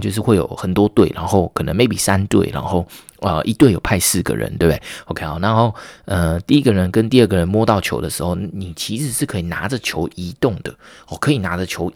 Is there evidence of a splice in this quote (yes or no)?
no